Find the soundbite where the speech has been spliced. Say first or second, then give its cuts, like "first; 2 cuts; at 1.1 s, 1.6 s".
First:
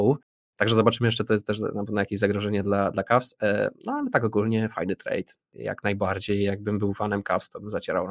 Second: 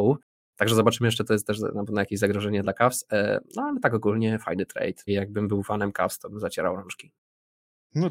second; 2 cuts; at 2.6 s, 5.1 s